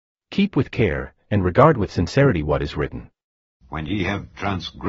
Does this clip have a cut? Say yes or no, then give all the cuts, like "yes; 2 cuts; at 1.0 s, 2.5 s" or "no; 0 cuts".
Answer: yes; 2 cuts; at 1.2 s, 3.6 s